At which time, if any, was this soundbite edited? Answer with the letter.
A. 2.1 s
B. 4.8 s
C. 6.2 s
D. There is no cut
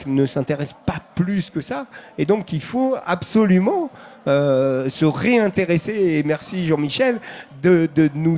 D